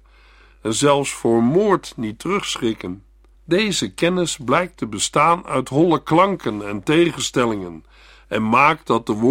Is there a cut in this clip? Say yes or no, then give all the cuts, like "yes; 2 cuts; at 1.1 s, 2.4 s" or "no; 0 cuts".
yes; 1 cut; at 3.3 s